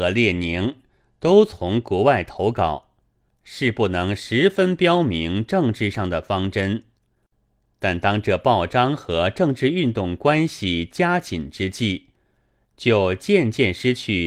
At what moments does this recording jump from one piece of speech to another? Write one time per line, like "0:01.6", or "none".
0:03.3